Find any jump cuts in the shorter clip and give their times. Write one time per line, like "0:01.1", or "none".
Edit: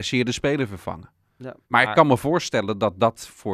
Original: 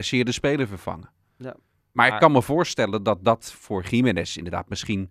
0:01.6